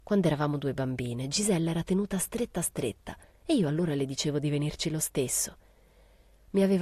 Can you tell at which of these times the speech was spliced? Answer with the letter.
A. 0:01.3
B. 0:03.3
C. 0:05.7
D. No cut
B